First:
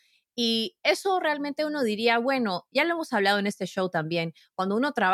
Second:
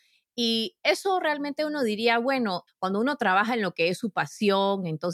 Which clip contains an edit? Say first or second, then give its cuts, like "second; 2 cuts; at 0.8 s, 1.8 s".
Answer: second; 1 cut; at 2.7 s